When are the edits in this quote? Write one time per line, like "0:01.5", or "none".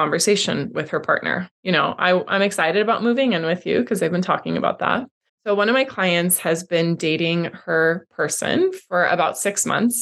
0:01.6
0:05.3